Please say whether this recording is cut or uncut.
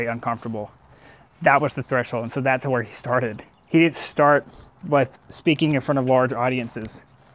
uncut